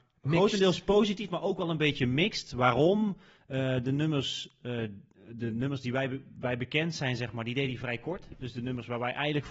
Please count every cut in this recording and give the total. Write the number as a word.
zero